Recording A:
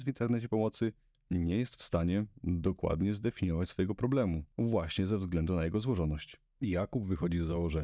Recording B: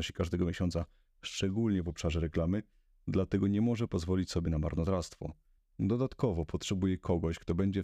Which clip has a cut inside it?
B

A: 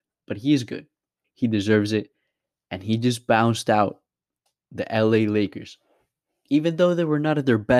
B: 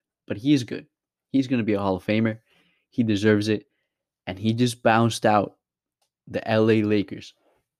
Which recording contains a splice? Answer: A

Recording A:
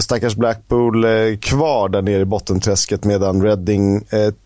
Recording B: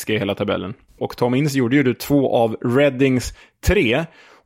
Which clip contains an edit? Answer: B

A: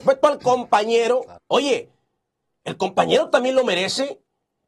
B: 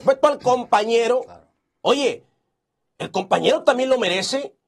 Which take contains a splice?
A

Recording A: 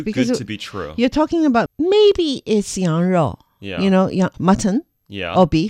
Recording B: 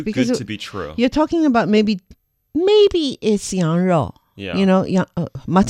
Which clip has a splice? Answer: A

